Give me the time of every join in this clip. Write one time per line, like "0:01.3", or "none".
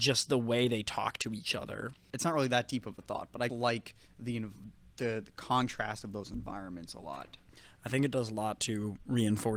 0:02.1
0:03.5